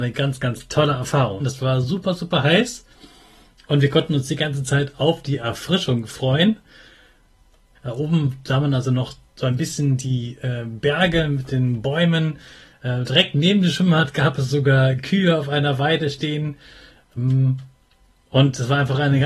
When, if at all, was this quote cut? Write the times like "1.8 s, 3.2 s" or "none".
1.4 s, 7.7 s